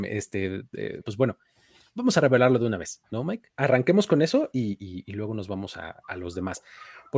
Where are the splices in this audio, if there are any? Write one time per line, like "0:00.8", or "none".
0:01.0
0:03.5